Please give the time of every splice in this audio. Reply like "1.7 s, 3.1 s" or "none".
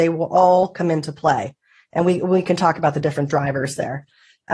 none